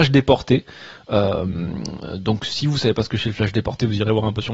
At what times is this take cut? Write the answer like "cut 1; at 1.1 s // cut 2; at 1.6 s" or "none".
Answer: none